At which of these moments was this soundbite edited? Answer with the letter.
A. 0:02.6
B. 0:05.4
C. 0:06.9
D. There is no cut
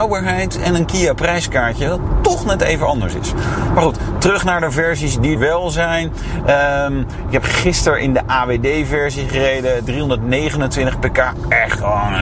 B